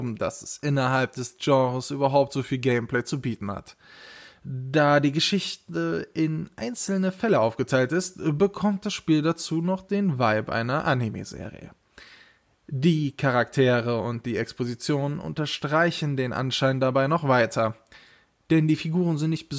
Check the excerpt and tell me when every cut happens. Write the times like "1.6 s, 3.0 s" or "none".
none